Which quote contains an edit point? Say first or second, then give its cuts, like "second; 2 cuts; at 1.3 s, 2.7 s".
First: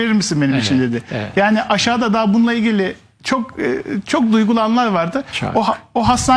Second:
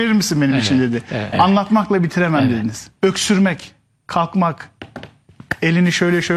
second; 2 cuts; at 1.3 s, 3.0 s